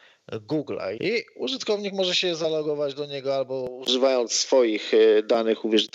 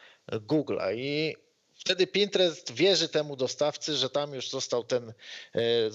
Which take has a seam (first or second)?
first